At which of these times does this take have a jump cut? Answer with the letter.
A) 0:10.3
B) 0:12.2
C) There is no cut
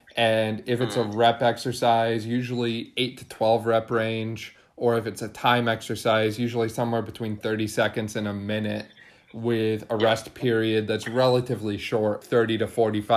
B